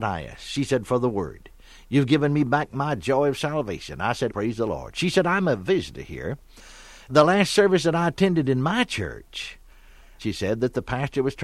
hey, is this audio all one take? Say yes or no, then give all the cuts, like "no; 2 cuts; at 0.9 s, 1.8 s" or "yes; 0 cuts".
no; 2 cuts; at 4.3 s, 10.2 s